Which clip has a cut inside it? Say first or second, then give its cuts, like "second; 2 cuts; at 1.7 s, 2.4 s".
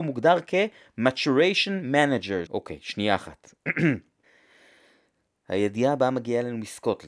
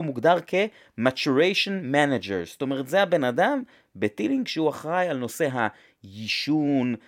first; 1 cut; at 2.5 s